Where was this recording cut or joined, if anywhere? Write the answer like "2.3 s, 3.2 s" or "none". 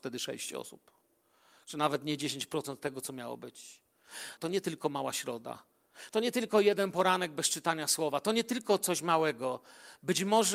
4.4 s, 6.1 s